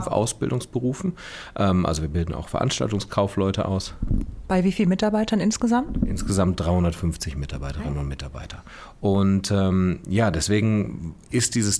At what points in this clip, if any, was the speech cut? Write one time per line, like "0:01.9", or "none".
none